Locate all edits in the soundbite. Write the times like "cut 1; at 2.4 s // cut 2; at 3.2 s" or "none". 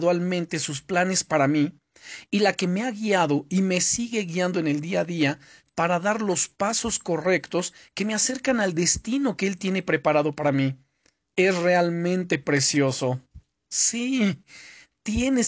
none